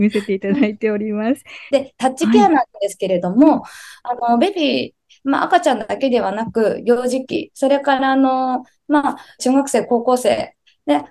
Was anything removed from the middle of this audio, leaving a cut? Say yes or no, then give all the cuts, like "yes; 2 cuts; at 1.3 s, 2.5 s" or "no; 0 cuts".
yes; 2 cuts; at 1.7 s, 9.4 s